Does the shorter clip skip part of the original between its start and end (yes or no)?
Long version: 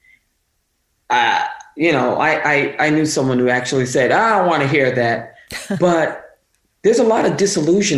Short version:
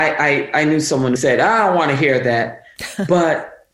yes